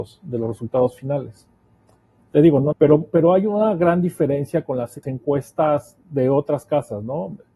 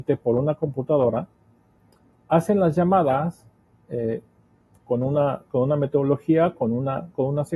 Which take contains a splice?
first; 2 cuts; at 2.7 s, 5.0 s

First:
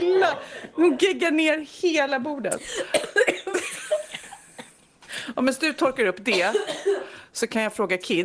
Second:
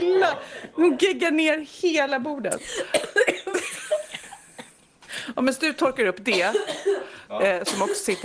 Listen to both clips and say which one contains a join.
second; 1 cut; at 7.3 s

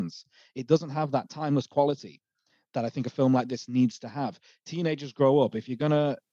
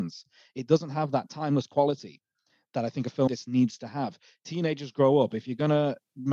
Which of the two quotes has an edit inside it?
second; 1 cut; at 3.3 s

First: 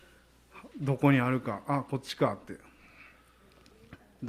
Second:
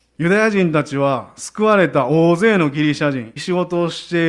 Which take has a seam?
second; 1 cut; at 3.4 s

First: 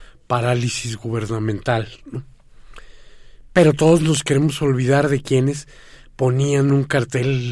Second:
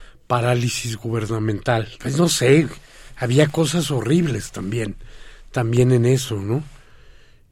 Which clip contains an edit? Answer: second; 1 cut; at 2.0 s

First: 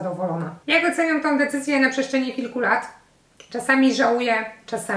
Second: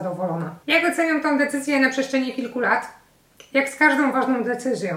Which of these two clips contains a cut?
first; 1 cut; at 3.5 s

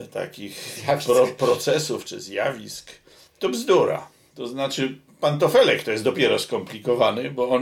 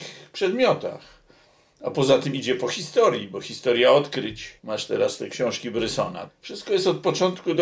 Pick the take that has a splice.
second; 2 cuts; at 4.6 s, 6.3 s

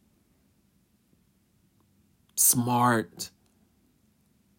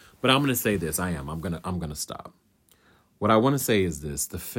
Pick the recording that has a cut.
first; 1 cut; at 2.2 s

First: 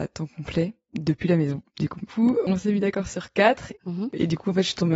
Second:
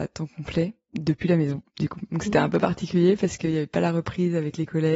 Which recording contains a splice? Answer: first; 2 cuts; at 2.1 s, 3.7 s

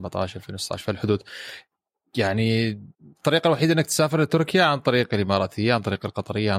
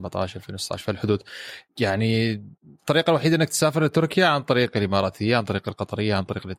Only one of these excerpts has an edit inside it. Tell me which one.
second; 1 cut; at 1.7 s

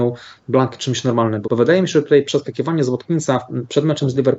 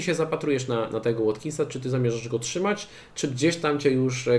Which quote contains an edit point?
first; 1 cut; at 1.4 s

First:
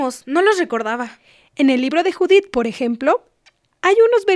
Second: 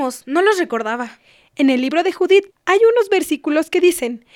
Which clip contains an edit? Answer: second; 1 cut; at 2.5 s

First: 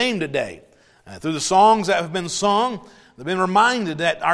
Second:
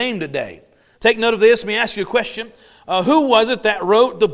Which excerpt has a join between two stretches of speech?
second; 1 cut; at 0.9 s

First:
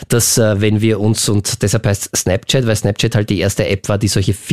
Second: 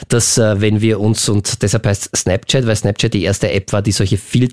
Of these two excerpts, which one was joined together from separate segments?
second; 1 cut; at 3.1 s

